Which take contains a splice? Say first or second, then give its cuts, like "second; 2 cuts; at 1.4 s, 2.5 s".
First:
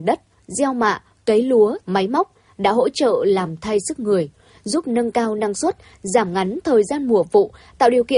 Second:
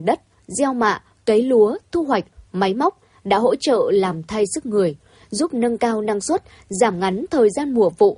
first; 1 cut; at 1.8 s